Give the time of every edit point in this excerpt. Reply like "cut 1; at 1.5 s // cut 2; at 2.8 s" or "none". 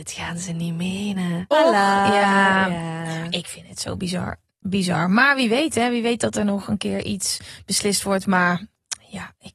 cut 1; at 1.5 s